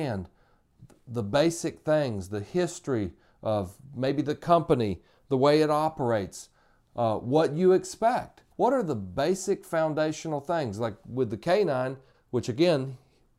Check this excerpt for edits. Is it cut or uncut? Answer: cut